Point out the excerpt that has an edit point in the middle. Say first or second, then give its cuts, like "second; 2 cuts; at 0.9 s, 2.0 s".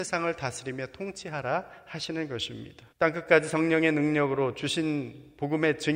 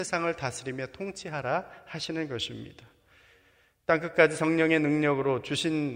first; 1 cut; at 2.9 s